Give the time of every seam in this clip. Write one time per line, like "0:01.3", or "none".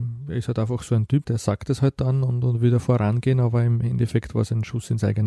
0:01.2